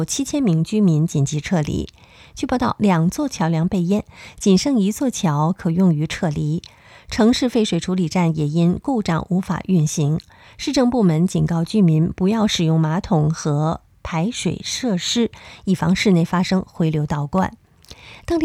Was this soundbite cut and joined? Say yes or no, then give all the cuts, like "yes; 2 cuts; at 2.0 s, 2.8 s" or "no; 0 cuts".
yes; 1 cut; at 2.8 s